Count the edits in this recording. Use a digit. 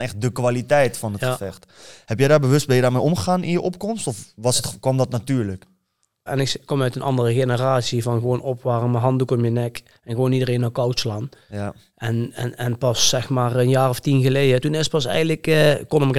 2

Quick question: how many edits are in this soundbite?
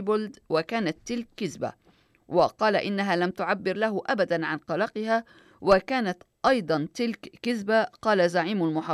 0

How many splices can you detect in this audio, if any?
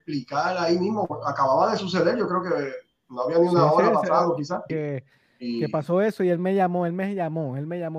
1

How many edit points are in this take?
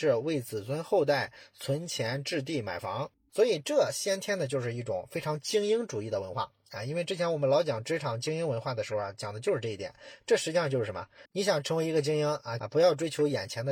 2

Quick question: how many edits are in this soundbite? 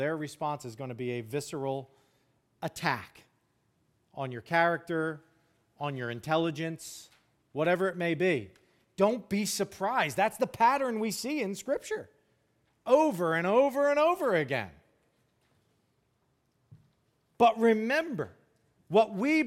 0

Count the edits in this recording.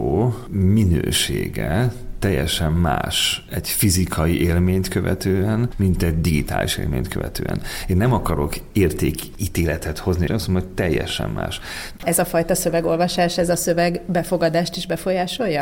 2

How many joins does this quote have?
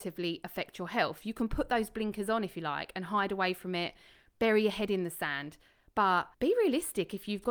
1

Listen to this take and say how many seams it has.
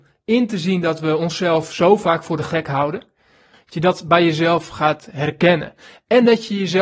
1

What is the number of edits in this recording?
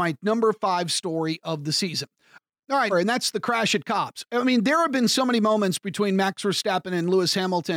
1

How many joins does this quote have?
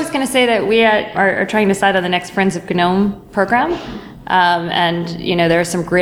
1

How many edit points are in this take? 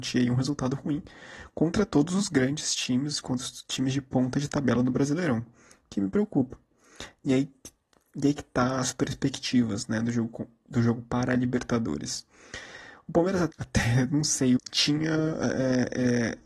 2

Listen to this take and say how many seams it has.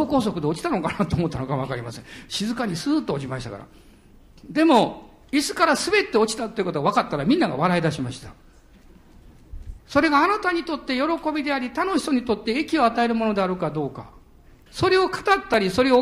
2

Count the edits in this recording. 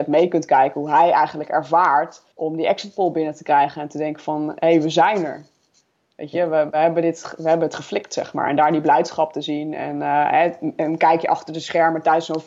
1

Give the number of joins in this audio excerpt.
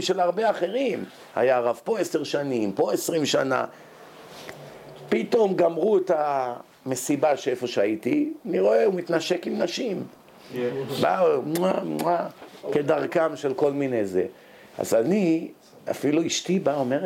0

